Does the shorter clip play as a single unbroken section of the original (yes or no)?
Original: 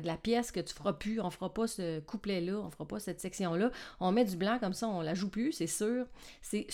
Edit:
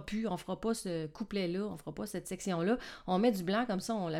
yes